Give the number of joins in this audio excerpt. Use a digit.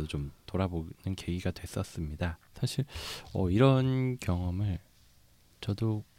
1